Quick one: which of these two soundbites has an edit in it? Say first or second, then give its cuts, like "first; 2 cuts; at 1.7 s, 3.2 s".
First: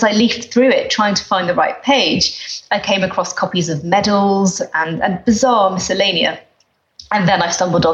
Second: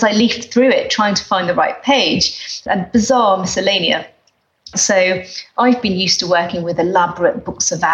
second; 2 cuts; at 2.7 s, 4.7 s